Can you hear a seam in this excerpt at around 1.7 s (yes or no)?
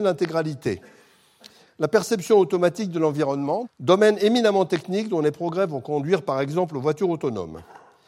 no